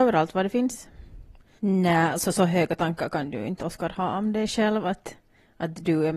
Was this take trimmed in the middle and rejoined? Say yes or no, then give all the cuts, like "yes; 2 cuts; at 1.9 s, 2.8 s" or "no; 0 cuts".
yes; 1 cut; at 1.6 s